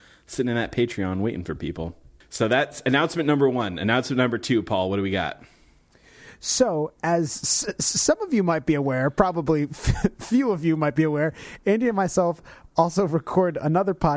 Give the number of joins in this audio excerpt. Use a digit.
0